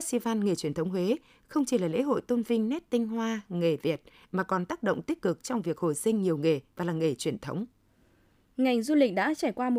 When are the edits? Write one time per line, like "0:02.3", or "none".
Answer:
none

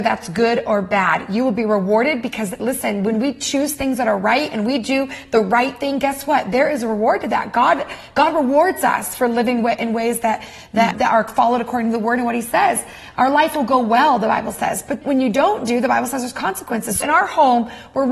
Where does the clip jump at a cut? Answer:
0:10.9
0:15.0
0:17.0

